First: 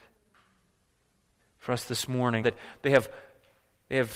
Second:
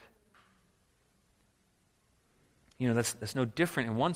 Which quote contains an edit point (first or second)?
first